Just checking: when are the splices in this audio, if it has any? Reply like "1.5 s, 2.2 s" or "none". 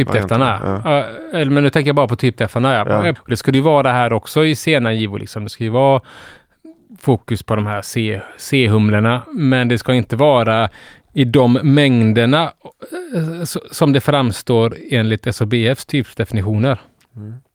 3.2 s